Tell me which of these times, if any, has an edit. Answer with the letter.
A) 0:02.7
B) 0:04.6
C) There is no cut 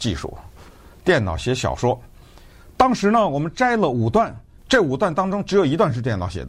B